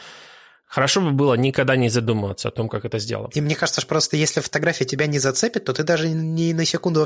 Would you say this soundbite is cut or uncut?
cut